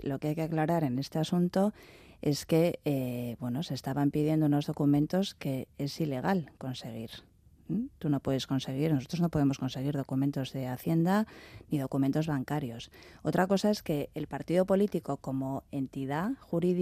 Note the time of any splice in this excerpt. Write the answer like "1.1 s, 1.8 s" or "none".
none